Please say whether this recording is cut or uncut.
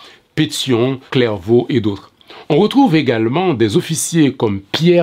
cut